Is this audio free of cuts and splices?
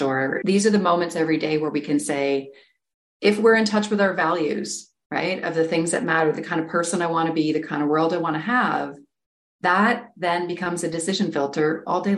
yes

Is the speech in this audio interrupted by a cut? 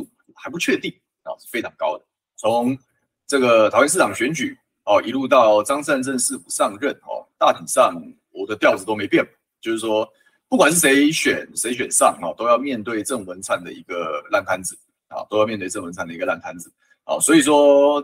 yes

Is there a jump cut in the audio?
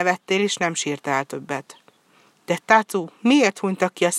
no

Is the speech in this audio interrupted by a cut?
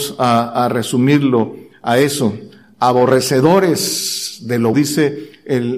yes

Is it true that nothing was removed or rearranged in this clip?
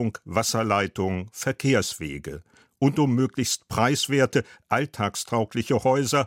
yes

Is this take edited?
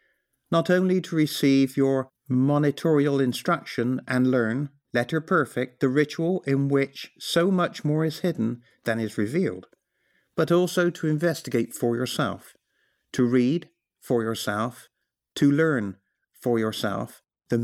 no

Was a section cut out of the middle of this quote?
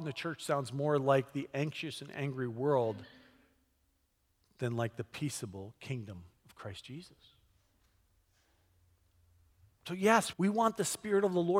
yes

